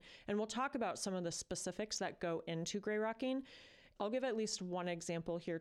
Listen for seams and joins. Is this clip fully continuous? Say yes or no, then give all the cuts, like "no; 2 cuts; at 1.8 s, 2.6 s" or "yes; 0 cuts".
no; 1 cut; at 4.0 s